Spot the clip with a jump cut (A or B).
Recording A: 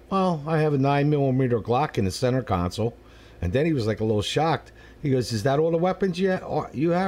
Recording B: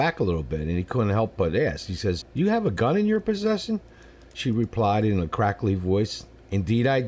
B